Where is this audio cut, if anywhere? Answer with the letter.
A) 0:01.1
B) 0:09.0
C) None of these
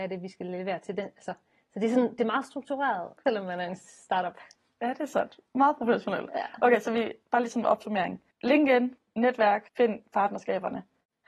C